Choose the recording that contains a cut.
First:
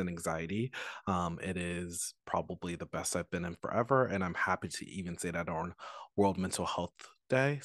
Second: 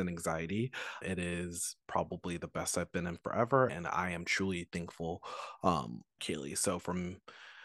second; 3 cuts; at 1.0 s, 3.7 s, 6.2 s

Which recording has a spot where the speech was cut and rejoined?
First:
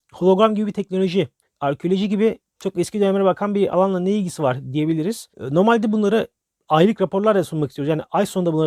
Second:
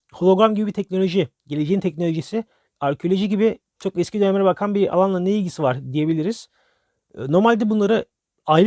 first; 2 cuts; at 1.4 s, 5.3 s

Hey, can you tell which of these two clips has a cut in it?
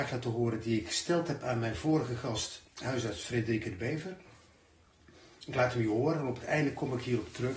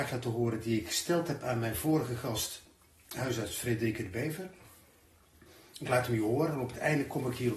first; 1 cut; at 2.7 s

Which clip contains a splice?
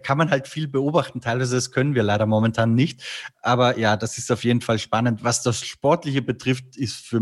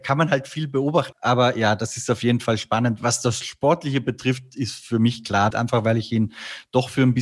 second; 2 cuts; at 1.1 s, 5.5 s

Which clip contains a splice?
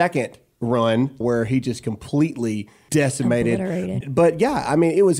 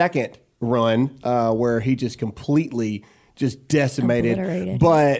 first; 3 cuts; at 1.2 s, 2.9 s, 4.0 s

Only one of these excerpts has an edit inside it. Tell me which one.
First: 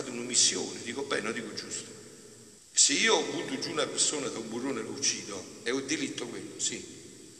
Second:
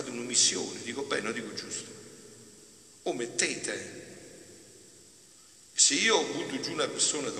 first; 1 cut; at 2.6 s

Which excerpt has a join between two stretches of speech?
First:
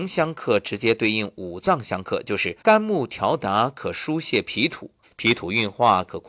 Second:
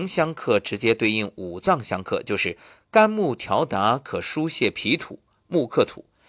first; 2 cuts; at 2.6 s, 5.0 s

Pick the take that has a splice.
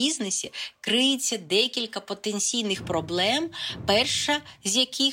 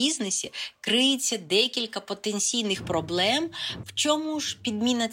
second; 1 cut; at 3.8 s

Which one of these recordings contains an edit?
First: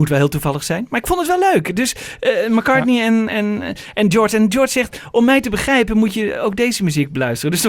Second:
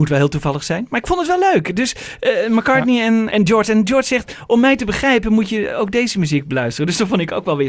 second; 1 cut; at 3.3 s

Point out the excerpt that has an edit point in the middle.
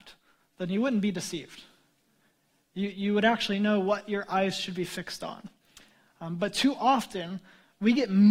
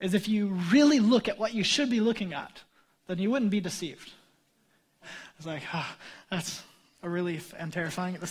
second; 1 cut; at 5.0 s

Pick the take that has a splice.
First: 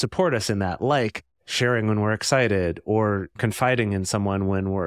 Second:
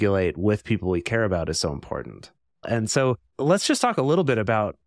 second; 1 cut; at 2.6 s

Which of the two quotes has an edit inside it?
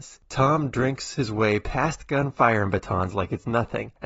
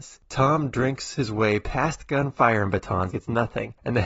second; 1 cut; at 3.1 s

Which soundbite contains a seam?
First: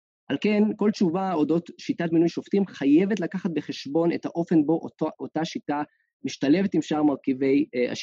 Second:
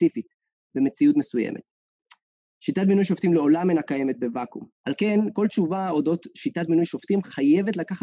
second; 1 cut; at 4.7 s

